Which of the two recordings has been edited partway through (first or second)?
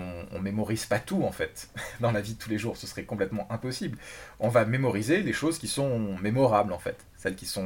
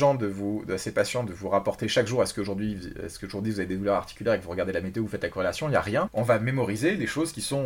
second